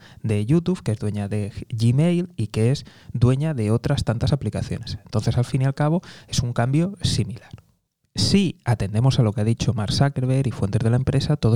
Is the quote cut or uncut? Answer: uncut